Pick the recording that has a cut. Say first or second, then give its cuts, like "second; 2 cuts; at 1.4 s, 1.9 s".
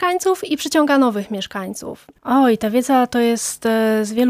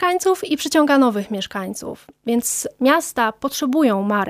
first; 1 cut; at 2.2 s